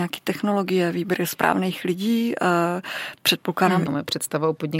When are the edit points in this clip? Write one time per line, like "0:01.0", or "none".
0:03.9